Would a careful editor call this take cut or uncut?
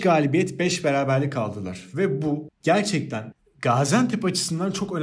uncut